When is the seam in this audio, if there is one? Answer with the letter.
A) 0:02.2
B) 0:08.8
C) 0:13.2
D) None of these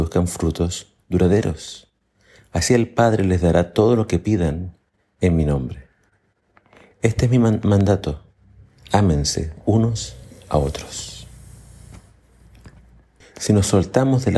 C